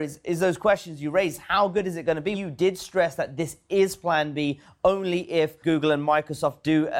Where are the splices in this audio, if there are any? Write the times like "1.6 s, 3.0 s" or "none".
2.3 s, 5.6 s